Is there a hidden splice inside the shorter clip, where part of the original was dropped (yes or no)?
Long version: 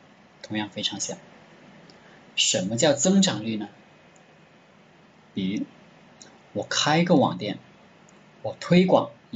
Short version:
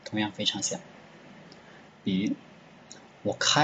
yes